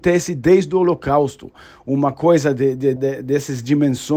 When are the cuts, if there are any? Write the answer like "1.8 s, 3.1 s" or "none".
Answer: 3.0 s